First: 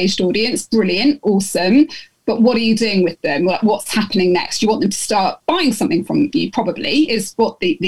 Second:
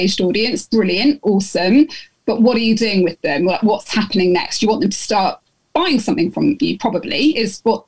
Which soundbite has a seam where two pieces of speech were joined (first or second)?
first